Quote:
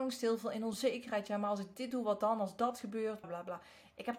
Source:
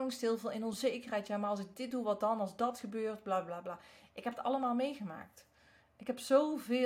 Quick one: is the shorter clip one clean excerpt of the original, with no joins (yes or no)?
no